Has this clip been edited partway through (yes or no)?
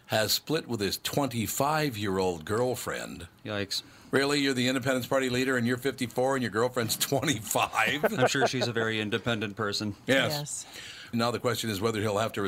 yes